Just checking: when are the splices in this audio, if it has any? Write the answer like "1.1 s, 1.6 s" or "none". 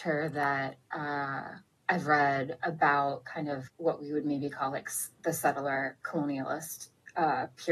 3.7 s

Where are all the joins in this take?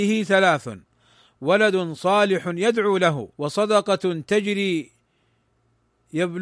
3.3 s

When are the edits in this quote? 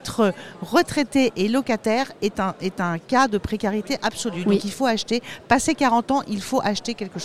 none

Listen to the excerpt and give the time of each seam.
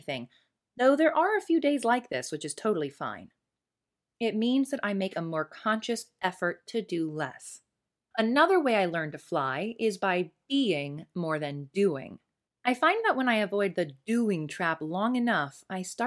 8.1 s, 12.5 s

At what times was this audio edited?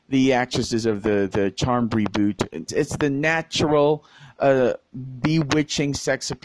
2.7 s

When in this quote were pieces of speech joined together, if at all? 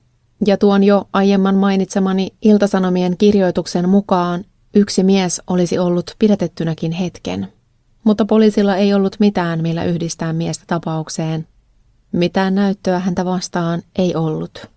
none

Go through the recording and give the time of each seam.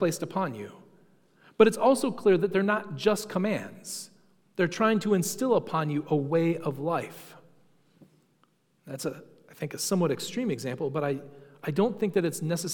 none

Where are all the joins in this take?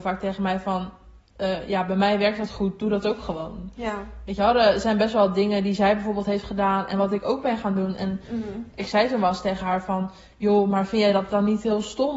none

